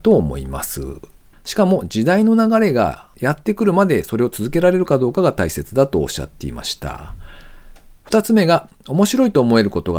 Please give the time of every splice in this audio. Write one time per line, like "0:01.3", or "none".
0:01.3

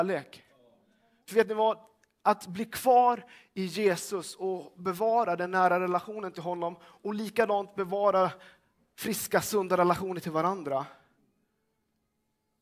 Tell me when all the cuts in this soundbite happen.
none

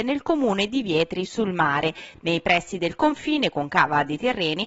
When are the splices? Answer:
none

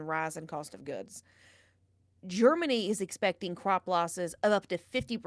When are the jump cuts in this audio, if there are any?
0:02.2

